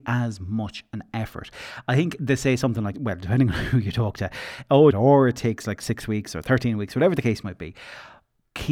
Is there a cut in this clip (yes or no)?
yes